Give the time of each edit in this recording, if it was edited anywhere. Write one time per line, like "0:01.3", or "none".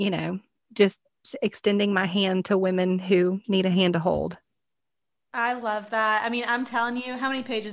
none